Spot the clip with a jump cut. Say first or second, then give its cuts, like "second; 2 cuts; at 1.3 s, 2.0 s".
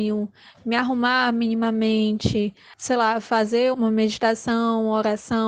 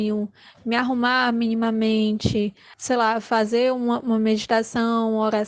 first; 1 cut; at 3.7 s